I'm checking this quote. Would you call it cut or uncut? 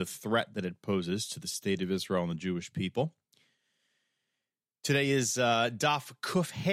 uncut